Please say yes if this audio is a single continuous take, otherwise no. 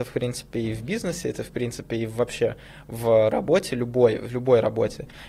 yes